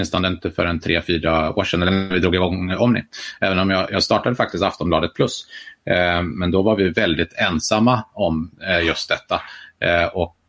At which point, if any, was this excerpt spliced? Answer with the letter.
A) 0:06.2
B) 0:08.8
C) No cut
C